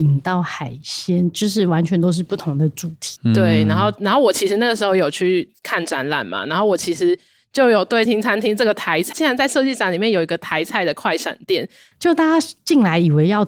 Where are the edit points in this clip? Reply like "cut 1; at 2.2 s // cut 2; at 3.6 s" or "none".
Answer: cut 1; at 8.1 s // cut 2; at 9.1 s // cut 3; at 11.9 s